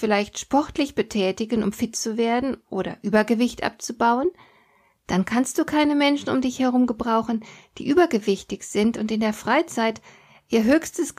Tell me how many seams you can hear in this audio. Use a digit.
0